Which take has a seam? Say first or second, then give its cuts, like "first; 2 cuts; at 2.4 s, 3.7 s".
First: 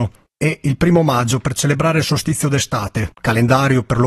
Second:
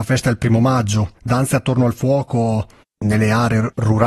first; 1 cut; at 3.1 s